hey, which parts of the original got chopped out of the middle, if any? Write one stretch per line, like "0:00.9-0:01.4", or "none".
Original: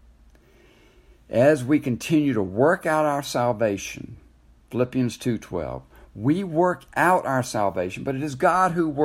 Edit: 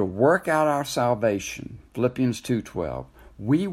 0:04.2-0:04.6